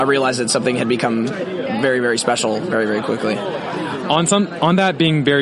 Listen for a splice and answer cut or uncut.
uncut